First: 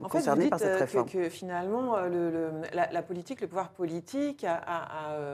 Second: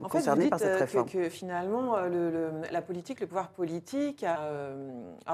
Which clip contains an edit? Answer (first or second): second